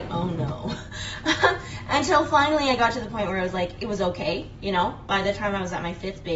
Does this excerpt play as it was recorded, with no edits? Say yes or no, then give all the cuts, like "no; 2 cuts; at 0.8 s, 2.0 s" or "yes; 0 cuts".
yes; 0 cuts